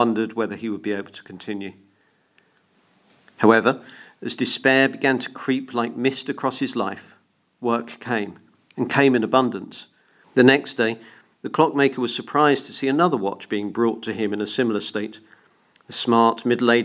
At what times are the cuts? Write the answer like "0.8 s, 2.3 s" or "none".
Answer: 10.2 s